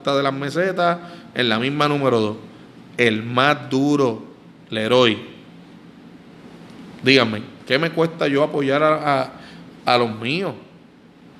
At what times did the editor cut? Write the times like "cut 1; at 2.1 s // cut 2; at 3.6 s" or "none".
none

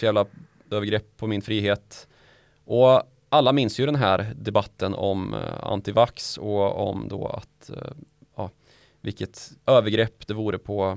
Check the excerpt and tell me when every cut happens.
none

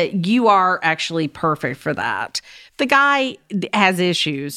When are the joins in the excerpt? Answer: none

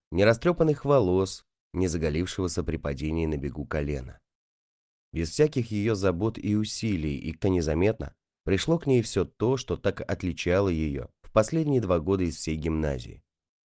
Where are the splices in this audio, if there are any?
cut 1; at 7.4 s

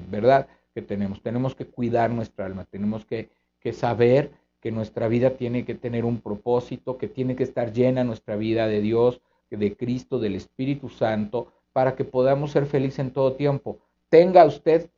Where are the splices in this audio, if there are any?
none

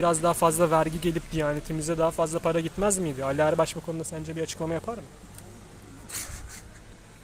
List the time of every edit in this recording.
none

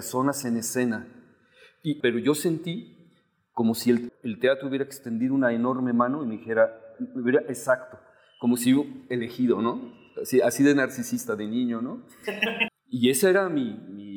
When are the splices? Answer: cut 1; at 2.0 s // cut 2; at 4.1 s // cut 3; at 12.7 s

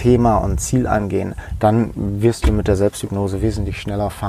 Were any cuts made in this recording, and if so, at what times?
none

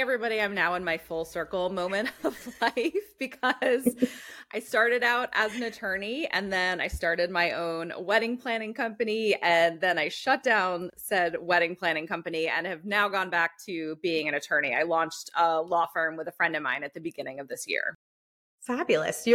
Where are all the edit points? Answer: none

